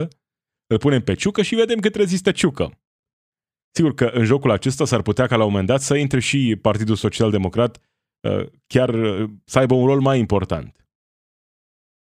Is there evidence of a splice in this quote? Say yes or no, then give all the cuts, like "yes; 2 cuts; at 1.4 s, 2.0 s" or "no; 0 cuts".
no; 0 cuts